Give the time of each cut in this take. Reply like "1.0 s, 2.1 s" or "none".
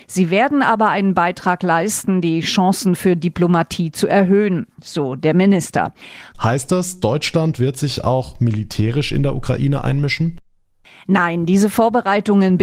6.3 s